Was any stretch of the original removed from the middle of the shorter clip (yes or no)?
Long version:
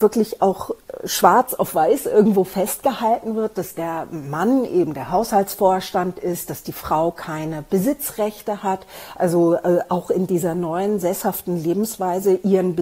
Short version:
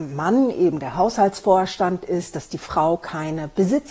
no